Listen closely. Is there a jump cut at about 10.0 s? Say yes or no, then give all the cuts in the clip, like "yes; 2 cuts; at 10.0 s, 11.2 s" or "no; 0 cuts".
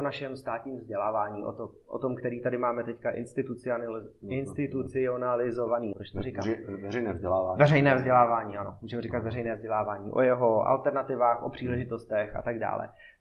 no; 1 cut; at 5.9 s